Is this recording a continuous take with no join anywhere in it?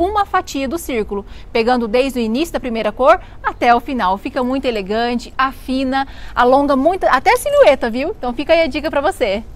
yes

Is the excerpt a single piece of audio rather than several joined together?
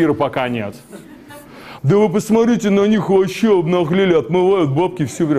no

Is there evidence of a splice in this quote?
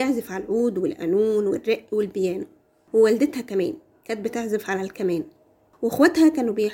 no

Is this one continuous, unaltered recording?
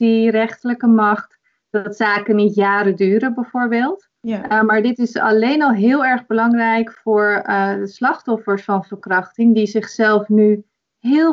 yes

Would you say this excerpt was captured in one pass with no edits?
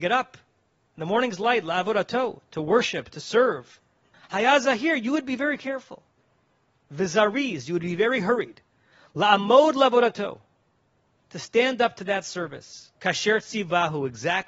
no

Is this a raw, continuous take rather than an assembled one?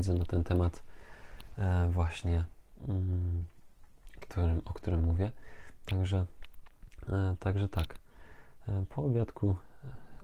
yes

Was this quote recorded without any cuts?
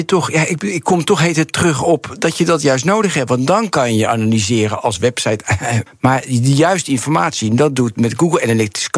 no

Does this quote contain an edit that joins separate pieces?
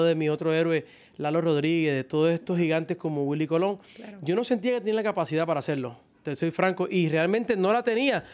no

